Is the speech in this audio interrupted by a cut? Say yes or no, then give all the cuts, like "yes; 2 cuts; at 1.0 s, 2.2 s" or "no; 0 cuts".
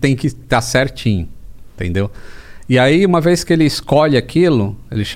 no; 0 cuts